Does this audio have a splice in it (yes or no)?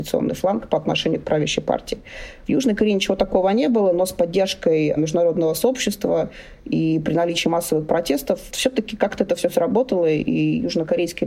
yes